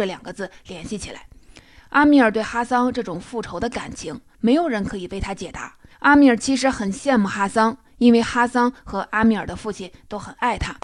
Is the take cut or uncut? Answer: cut